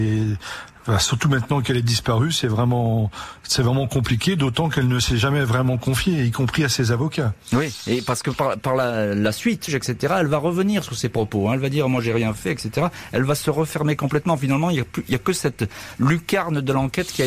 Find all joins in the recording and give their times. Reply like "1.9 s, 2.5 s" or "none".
9.7 s